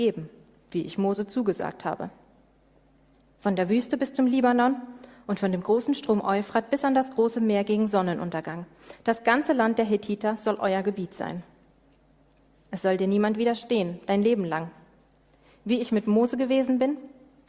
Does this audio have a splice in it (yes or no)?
no